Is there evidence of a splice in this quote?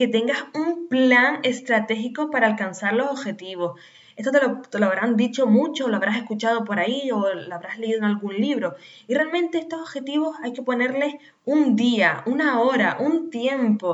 no; 0 cuts

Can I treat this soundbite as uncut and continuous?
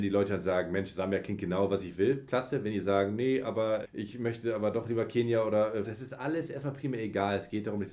no; 2 cuts; at 3.8 s, 5.8 s

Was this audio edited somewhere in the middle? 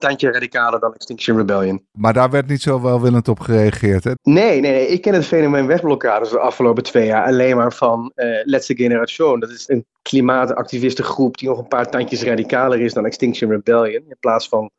yes; 1 cut; at 4.2 s

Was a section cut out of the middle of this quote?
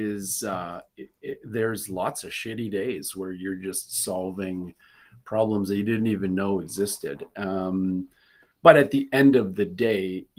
no; 0 cuts

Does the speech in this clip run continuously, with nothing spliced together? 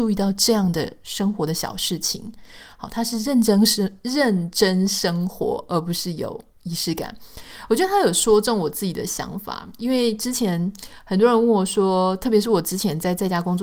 yes; 0 cuts

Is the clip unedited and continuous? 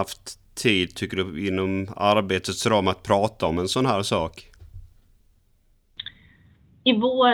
yes; 0 cuts

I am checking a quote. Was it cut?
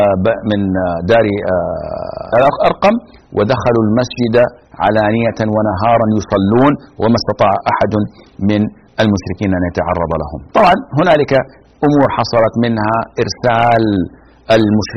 yes; 2 cuts; at 2.3 s, 10.5 s

